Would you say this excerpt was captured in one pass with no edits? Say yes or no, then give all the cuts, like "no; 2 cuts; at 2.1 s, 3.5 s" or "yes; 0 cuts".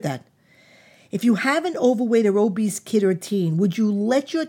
yes; 0 cuts